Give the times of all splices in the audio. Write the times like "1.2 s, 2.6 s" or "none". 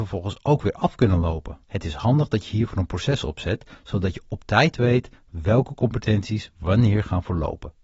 1.6 s

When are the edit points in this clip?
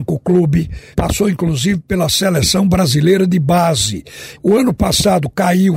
0.9 s, 4.4 s

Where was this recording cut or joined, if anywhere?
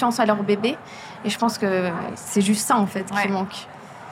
none

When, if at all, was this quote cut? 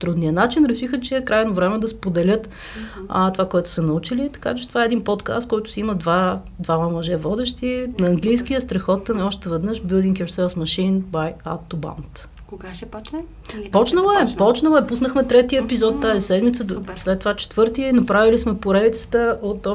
none

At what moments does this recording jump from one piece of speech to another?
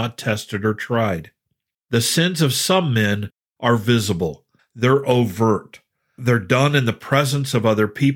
1.7 s, 4.6 s

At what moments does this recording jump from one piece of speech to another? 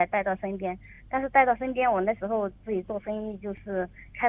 none

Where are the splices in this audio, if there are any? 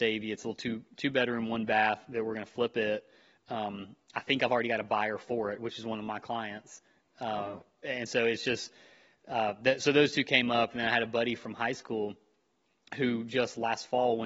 none

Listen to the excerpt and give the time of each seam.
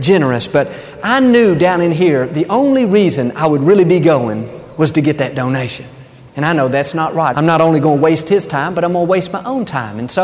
7.3 s

